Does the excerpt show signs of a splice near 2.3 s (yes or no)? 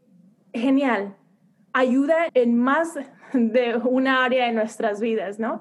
yes